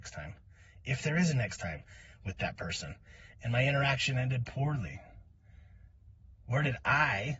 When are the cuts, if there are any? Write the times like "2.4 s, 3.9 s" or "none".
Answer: 3.3 s